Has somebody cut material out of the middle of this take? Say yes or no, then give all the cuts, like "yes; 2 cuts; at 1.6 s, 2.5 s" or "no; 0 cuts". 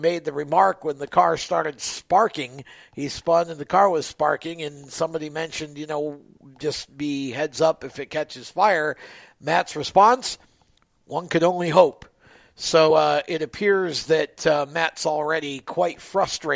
no; 0 cuts